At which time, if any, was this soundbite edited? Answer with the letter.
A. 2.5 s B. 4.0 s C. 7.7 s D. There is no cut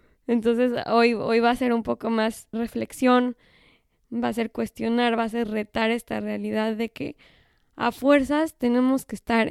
A